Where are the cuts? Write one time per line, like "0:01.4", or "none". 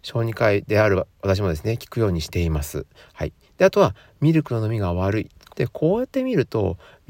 0:05.5